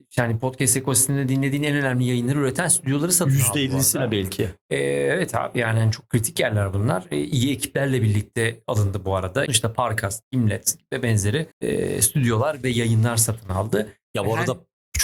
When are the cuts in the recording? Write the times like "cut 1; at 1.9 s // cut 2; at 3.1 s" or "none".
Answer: cut 1; at 9.5 s // cut 2; at 11.5 s